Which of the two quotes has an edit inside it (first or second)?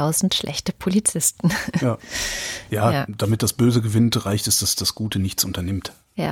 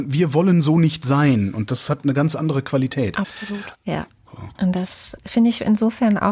second